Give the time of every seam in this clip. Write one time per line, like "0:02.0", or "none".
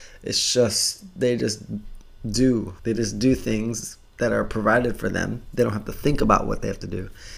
0:02.8

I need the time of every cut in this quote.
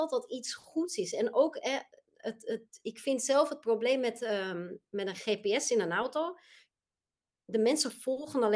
none

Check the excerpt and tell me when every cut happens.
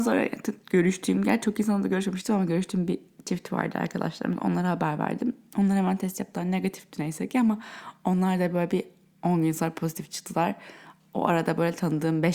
none

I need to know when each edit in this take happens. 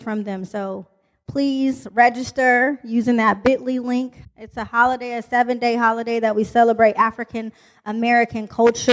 0:04.2

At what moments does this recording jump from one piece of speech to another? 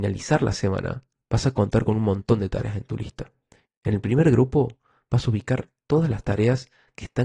0:03.7

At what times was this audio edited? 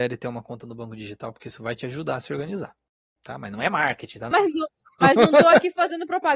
0:04.3

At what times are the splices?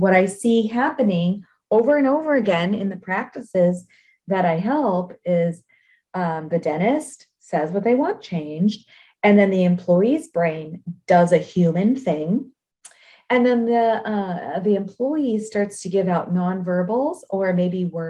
none

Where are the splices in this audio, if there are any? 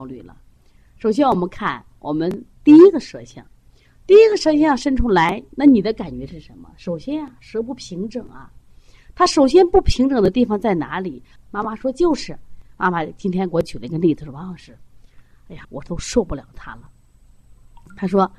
0:11.4
0:15.6

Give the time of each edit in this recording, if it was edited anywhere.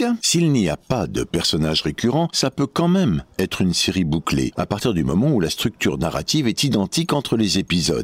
none

